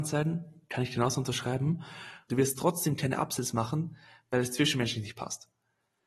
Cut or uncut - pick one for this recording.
cut